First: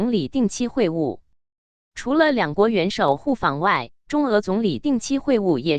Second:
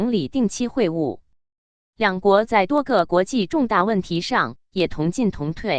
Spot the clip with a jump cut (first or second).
first